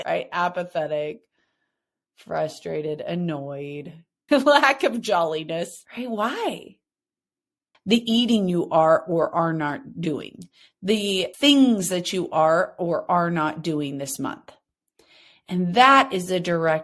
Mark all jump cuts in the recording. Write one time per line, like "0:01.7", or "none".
0:04.3
0:07.7